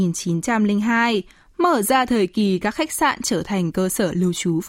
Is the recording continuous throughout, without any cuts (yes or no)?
yes